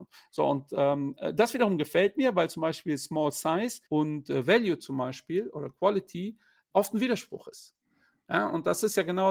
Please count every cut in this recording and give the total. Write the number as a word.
two